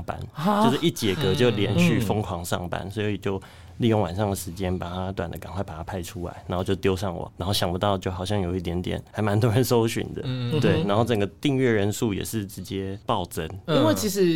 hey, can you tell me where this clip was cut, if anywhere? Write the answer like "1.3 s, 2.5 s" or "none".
5.2 s